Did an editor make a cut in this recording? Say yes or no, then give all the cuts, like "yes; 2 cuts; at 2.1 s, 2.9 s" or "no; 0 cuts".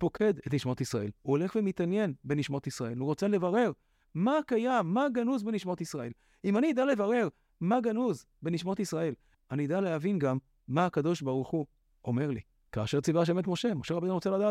yes; 2 cuts; at 9.3 s, 12.7 s